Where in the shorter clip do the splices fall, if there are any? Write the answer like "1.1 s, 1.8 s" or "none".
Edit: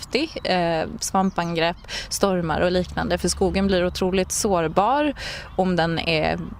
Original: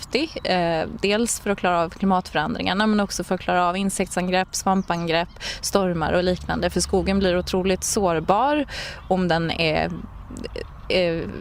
1.0 s